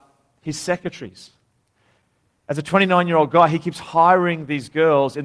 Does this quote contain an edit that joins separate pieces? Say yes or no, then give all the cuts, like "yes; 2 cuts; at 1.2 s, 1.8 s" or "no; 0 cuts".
no; 0 cuts